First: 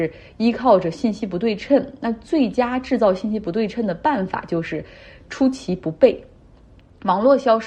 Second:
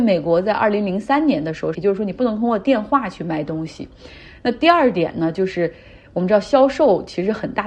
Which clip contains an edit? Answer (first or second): second